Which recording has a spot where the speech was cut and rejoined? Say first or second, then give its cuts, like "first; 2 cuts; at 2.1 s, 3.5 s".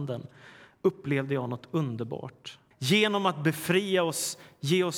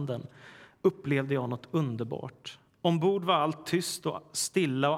first; 1 cut; at 2.7 s